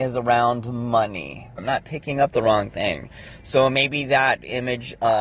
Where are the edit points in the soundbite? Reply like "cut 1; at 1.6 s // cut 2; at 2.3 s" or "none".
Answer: cut 1; at 1.6 s